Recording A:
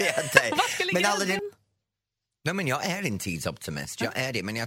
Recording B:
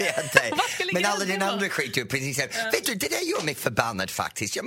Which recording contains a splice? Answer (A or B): A